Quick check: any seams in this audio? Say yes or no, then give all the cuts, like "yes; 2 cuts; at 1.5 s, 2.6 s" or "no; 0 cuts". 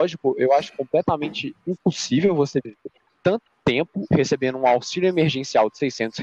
yes; 1 cut; at 4.1 s